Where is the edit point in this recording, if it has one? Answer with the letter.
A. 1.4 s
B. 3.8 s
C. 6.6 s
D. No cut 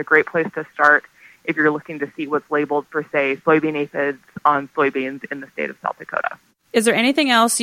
D